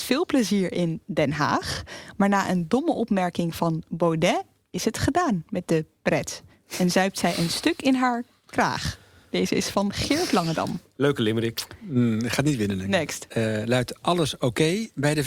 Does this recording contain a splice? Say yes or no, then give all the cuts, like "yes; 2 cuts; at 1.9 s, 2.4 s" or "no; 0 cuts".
yes; 1 cut; at 13.3 s